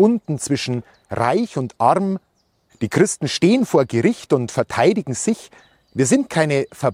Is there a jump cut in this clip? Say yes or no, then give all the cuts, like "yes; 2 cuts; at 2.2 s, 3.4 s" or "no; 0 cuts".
yes; 1 cut; at 2.7 s